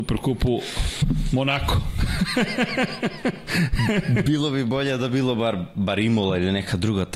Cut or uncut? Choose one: uncut